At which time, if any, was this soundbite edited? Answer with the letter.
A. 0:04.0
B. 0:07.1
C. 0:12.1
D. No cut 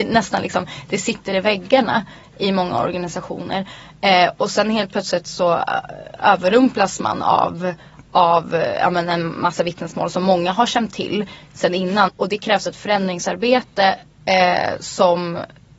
C